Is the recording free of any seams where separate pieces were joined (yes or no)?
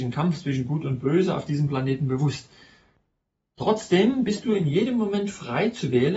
yes